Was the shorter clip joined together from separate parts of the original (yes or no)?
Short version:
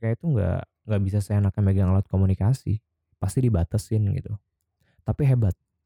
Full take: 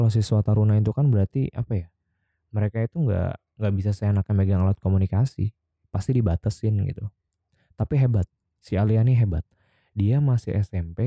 no